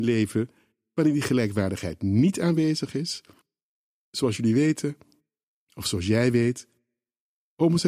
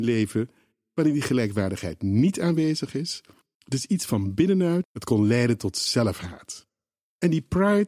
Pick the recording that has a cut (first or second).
second